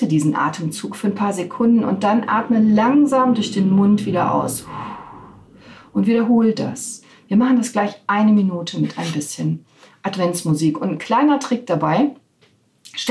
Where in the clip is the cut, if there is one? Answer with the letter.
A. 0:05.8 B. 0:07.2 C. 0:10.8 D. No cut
D